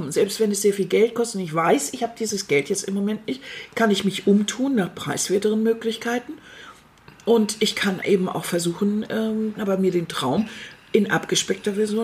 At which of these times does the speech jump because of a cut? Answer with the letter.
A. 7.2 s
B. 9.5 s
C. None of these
B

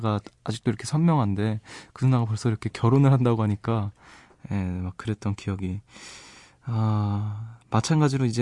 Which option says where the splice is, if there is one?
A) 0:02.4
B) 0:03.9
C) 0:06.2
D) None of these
D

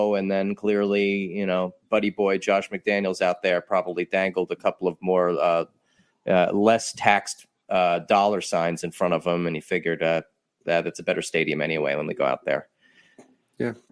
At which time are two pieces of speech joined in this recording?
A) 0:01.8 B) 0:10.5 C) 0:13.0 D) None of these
A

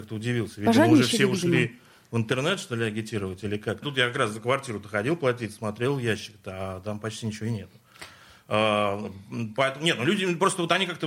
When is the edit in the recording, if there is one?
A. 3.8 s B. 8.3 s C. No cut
A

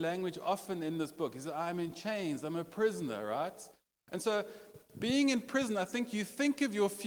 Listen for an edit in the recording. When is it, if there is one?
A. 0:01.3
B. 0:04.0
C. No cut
C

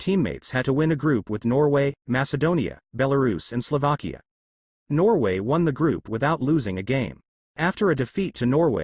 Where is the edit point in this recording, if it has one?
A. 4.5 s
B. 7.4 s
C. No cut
C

